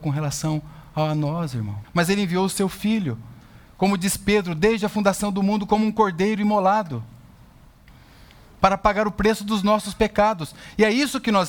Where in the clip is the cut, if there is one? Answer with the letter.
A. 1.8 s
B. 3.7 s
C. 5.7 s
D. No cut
A